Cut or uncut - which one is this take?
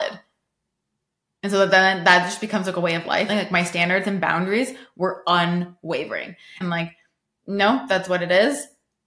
cut